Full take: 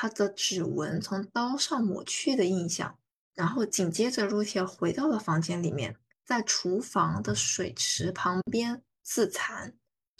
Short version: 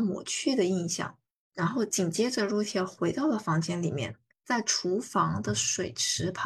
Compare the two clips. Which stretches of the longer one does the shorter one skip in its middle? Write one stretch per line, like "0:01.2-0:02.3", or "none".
none